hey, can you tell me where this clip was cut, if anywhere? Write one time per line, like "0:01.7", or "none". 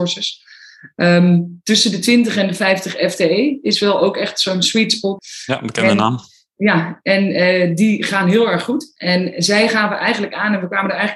0:05.2